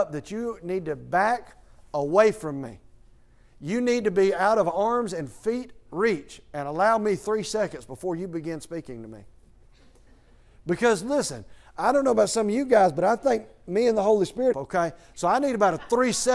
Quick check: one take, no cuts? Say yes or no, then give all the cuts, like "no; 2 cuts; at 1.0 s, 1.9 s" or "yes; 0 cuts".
no; 1 cut; at 14.5 s